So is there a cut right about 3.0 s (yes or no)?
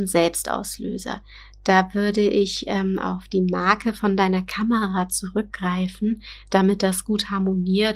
no